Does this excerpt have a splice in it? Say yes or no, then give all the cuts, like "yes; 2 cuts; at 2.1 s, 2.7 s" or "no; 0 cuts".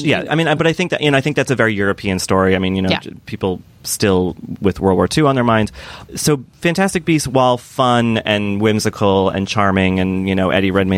no; 0 cuts